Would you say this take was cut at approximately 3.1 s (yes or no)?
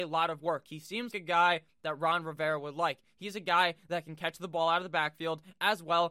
no